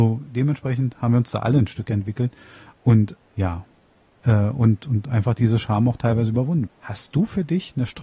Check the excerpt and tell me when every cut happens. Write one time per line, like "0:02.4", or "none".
0:03.2
0:06.7